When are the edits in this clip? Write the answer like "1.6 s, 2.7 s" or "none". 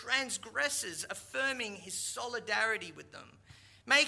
none